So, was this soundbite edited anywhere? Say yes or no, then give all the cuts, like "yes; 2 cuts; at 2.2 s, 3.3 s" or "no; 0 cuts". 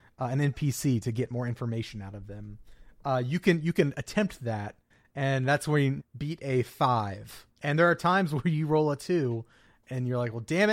yes; 2 cuts; at 6.0 s, 7.5 s